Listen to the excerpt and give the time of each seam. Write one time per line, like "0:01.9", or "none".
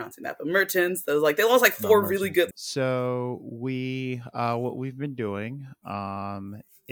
0:02.5